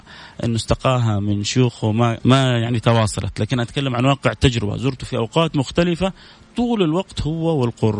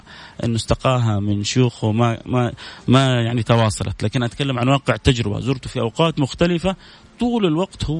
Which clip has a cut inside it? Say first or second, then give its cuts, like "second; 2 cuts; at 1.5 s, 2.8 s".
first; 1 cut; at 2.2 s